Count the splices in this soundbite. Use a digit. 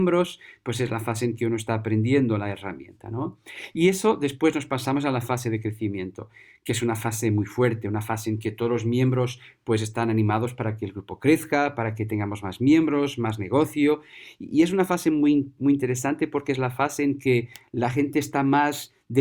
0